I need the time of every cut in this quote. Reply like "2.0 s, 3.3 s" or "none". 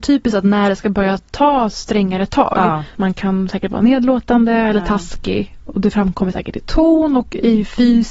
3.0 s